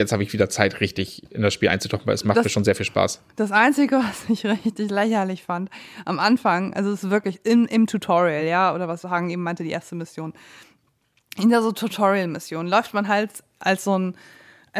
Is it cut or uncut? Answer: uncut